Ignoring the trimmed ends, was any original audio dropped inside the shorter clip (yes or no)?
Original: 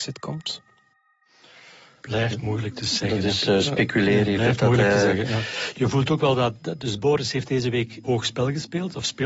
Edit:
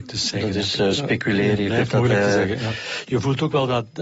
no